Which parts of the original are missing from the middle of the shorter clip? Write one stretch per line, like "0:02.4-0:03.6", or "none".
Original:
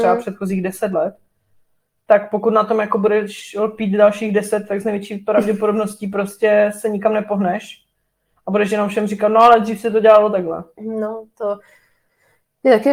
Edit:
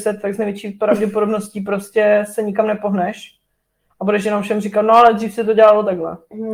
none